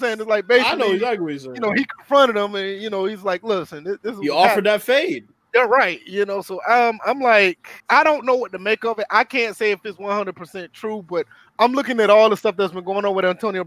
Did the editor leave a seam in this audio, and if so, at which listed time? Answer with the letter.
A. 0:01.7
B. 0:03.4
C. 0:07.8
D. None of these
C